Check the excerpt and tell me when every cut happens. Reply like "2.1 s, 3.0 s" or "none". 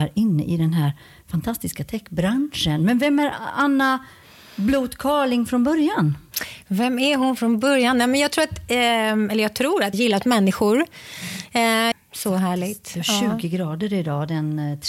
9.9 s, 11.9 s